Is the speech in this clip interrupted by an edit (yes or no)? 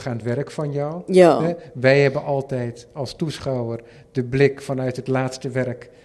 no